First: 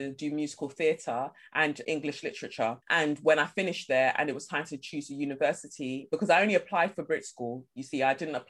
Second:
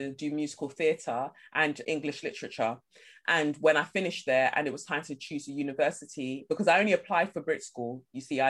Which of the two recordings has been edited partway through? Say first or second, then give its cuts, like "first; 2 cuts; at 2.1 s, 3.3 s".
first; 1 cut; at 2.8 s